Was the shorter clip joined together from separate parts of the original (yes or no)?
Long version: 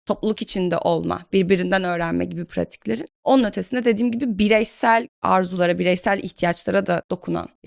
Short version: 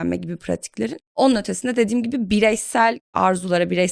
no